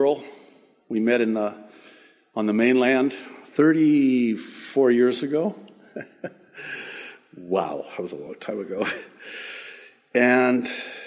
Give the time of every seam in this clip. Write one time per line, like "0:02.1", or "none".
none